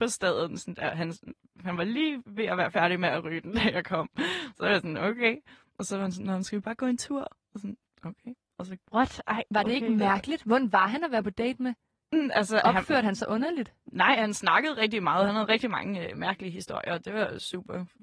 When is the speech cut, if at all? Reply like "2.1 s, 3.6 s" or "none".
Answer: none